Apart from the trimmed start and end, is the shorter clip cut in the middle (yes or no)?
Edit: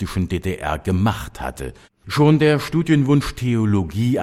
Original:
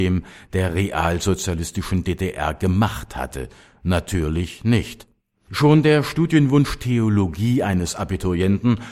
yes